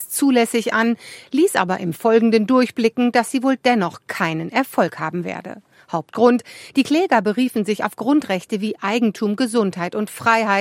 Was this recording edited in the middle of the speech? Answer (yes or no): no